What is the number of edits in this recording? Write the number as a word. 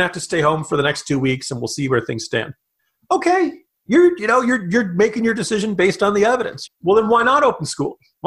one